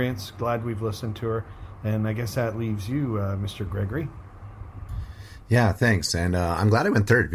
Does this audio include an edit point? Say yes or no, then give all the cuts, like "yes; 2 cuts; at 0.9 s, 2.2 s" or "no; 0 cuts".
no; 0 cuts